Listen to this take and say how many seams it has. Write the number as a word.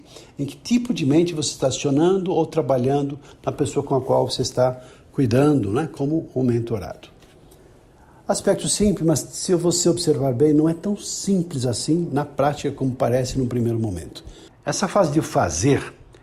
one